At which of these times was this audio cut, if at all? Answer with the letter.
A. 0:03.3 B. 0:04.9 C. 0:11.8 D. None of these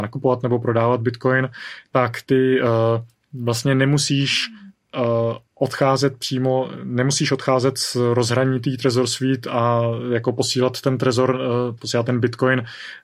C